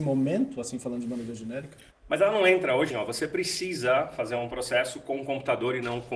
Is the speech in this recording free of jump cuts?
no; 2 cuts; at 1.9 s, 2.9 s

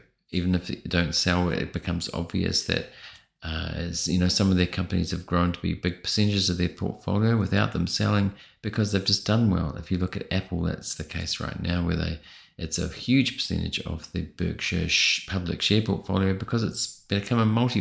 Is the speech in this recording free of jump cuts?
yes; 0 cuts

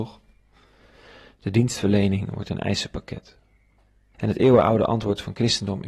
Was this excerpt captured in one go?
no; 1 cut; at 4.1 s

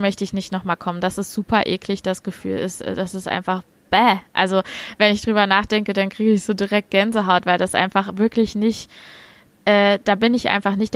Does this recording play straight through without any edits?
yes; 0 cuts

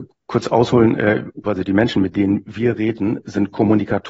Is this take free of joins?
no; 1 cut; at 1.4 s

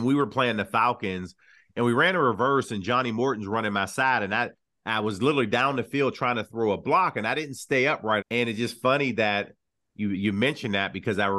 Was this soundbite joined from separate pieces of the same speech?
yes; 1 cut; at 8.2 s

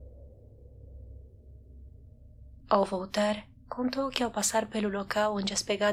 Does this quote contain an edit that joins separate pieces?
yes; 1 cut; at 2.6 s

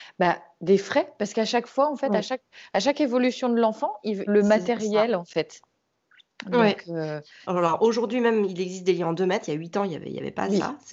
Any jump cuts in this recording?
yes; 2 cuts; at 4.3 s, 7.4 s

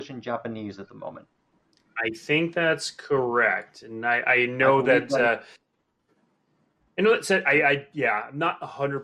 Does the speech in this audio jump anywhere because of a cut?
no; 0 cuts

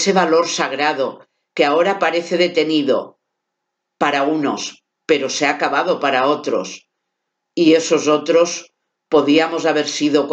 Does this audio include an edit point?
no; 0 cuts

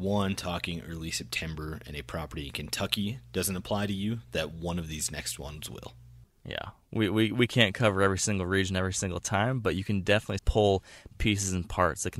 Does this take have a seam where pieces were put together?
yes; 1 cut; at 10.4 s

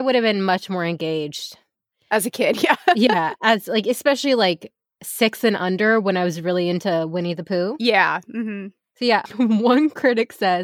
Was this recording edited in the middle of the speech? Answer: no; 0 cuts

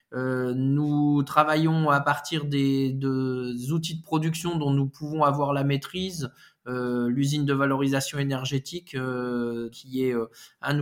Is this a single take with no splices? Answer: no; 1 cut; at 9.7 s

